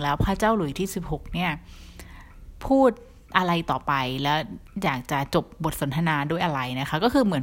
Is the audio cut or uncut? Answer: uncut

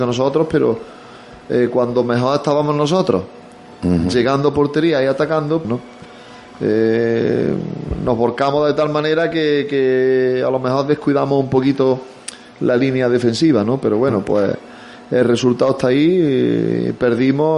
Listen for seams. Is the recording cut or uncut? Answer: cut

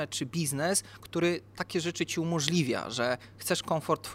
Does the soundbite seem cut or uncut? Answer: uncut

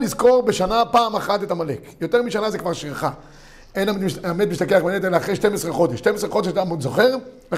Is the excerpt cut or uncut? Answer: uncut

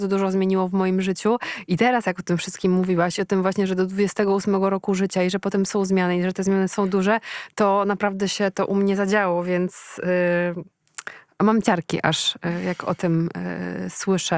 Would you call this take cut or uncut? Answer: uncut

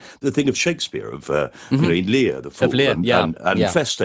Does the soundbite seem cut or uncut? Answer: uncut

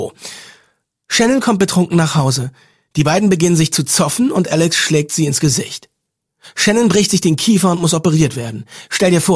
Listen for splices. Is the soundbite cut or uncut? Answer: uncut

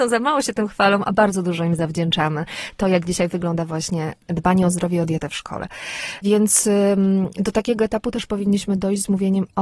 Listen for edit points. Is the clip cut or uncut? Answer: uncut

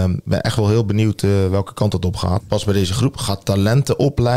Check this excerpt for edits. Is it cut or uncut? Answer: cut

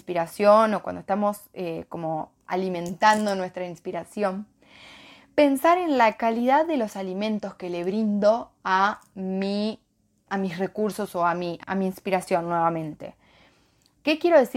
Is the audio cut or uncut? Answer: cut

